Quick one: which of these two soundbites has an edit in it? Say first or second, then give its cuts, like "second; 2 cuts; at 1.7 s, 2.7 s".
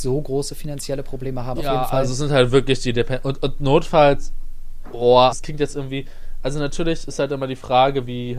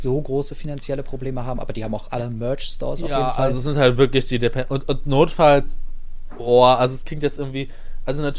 first; 2 cuts; at 1.6 s, 5.3 s